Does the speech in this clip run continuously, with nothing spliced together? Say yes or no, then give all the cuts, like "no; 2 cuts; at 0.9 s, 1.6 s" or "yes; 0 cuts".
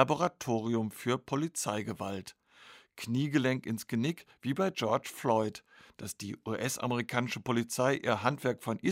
yes; 0 cuts